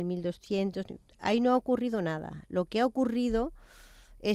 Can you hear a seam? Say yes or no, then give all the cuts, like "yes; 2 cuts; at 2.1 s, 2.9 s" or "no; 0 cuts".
no; 0 cuts